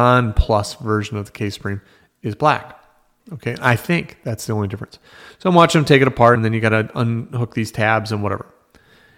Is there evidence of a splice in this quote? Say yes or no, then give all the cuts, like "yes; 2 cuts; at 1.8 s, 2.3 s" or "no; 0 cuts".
yes; 1 cut; at 6.4 s